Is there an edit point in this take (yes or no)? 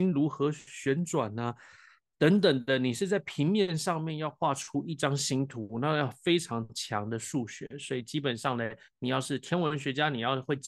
no